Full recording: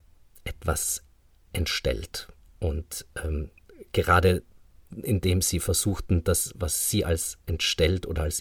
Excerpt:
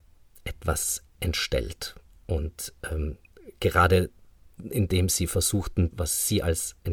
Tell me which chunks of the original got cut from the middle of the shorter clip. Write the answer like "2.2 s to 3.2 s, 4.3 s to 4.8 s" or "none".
1.1 s to 1.4 s, 6.2 s to 6.5 s